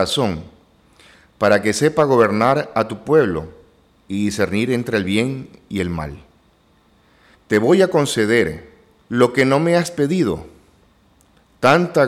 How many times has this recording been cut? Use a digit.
2